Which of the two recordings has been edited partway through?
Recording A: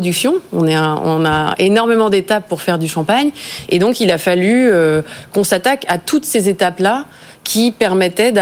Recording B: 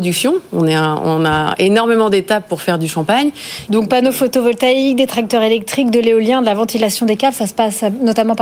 B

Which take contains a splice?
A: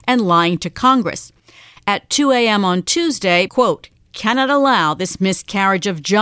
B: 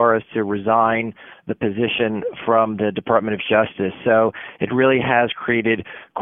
A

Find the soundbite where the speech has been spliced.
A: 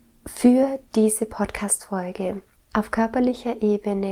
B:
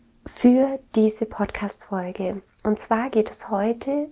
A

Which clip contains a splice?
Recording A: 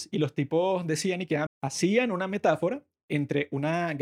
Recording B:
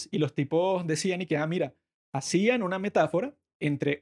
A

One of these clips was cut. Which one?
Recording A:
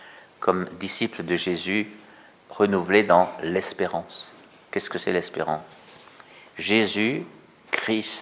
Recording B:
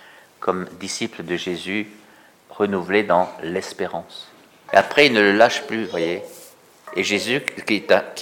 B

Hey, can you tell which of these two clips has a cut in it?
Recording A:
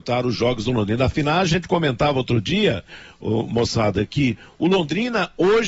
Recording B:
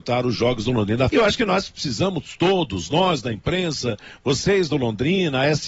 B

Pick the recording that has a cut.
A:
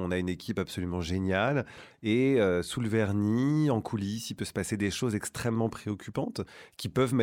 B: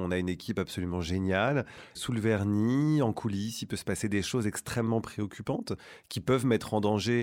B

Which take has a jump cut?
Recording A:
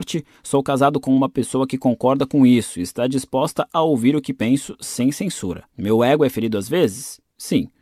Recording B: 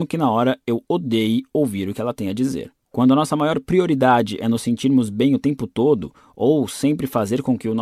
A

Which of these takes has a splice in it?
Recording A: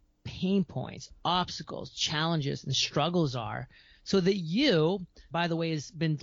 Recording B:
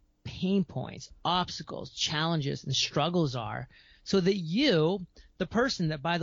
A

